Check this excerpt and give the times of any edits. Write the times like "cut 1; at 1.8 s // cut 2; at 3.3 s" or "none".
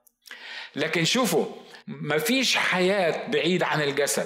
cut 1; at 1.8 s